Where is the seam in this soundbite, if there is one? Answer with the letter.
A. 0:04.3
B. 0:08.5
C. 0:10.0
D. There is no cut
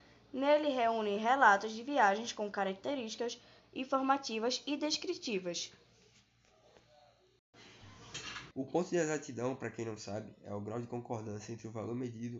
B